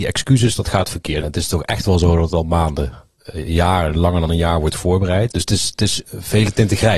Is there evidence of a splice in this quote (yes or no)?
yes